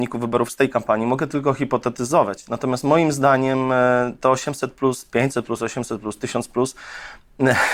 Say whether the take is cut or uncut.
uncut